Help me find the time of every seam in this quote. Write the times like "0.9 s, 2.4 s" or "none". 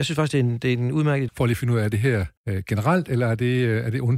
1.3 s, 2.4 s